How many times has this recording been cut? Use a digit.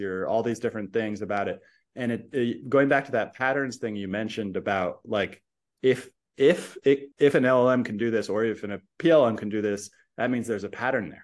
1